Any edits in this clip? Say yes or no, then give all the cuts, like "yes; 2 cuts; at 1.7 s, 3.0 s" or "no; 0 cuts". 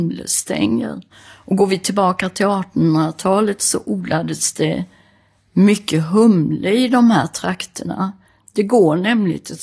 yes; 2 cuts; at 1.1 s, 8.4 s